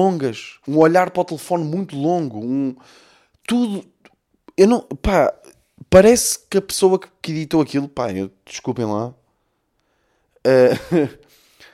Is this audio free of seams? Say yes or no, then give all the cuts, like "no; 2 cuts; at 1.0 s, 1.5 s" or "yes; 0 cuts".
yes; 0 cuts